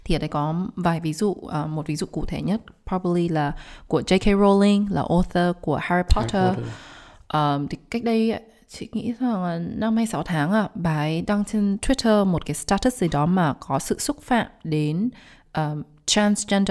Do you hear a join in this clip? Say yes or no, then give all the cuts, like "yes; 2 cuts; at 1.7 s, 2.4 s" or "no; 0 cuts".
no; 0 cuts